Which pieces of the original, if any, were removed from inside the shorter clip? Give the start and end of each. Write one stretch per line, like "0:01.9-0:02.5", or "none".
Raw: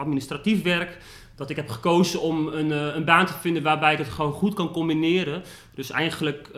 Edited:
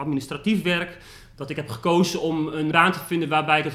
0:02.7-0:03.1